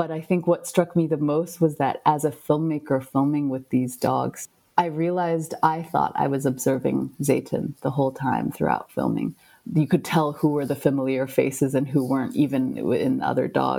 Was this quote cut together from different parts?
yes; 1 cut; at 9.6 s

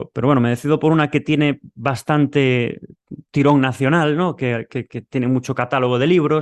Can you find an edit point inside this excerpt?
no; 0 cuts

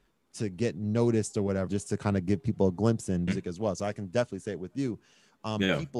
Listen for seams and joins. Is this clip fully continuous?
no; 2 cuts; at 1.7 s, 3.3 s

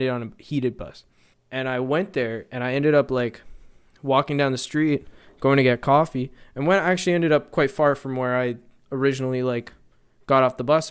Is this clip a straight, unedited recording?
no; 1 cut; at 1.3 s

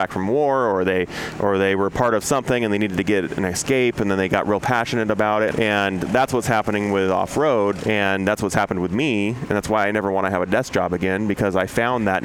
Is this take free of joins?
no; 2 cuts; at 5.5 s, 7.8 s

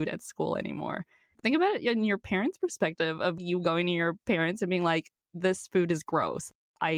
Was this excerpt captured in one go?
yes; 0 cuts

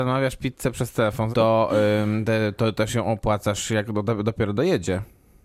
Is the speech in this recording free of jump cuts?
no; 1 cut; at 1.3 s

